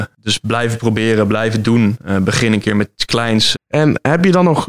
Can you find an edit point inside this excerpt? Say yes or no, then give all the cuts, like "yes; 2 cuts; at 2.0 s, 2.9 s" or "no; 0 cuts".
yes; 1 cut; at 3.5 s